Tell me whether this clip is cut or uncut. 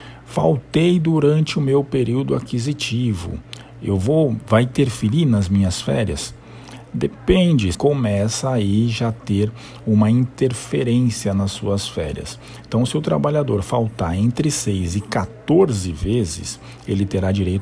cut